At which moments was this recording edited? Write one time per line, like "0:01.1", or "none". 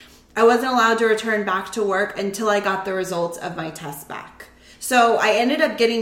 0:04.7